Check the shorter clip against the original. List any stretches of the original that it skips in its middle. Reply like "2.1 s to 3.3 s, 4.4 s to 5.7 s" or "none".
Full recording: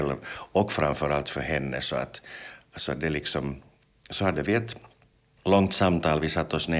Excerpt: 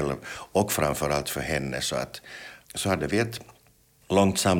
2.6 s to 4.0 s